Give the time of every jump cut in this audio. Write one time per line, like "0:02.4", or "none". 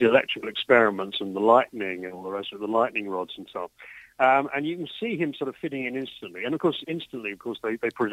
none

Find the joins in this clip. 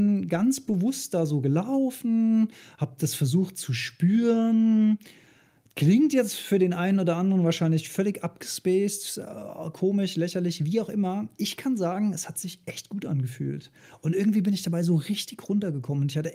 none

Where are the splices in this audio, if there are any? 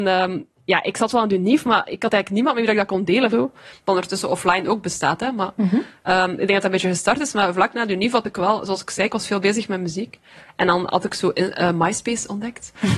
0:03.3

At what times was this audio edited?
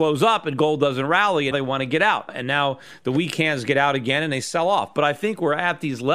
0:01.5

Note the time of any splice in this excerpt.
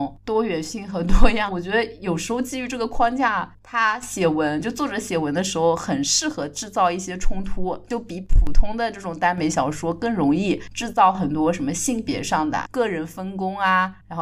0:01.5
0:12.6

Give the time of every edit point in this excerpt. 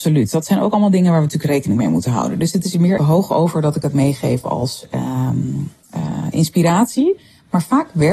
0:03.0

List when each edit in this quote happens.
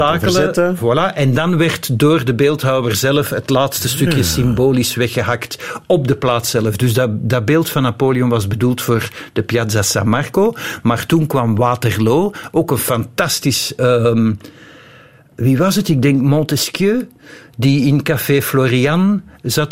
none

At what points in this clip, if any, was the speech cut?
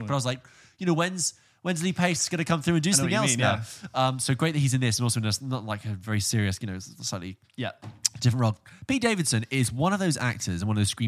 none

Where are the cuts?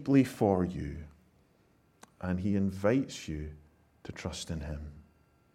none

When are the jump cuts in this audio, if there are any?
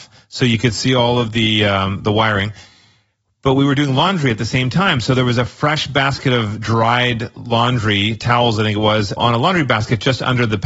0:09.2

